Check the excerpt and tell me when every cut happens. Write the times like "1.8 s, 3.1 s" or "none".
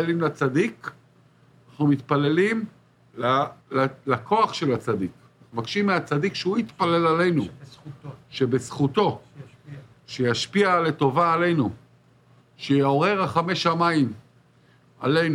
3.6 s